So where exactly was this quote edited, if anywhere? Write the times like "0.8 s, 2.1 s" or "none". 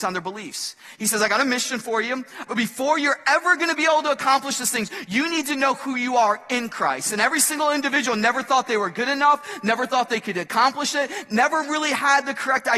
2.5 s